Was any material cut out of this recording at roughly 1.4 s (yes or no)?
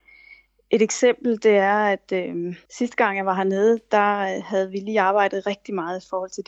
no